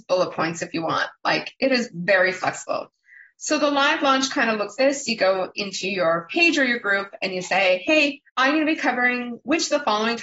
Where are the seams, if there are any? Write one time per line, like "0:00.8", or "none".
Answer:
0:04.8
0:08.3